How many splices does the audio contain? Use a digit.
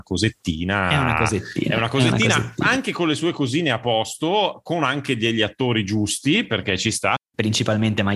1